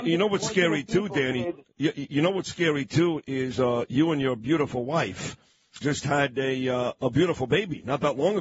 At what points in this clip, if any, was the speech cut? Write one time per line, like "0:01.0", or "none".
0:05.8